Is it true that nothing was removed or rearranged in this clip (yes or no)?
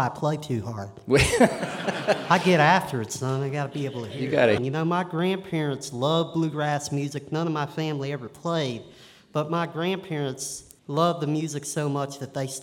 no